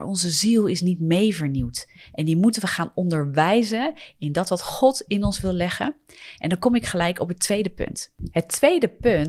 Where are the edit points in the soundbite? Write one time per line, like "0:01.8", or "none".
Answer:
none